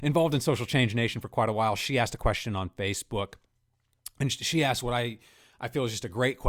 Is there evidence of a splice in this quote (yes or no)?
no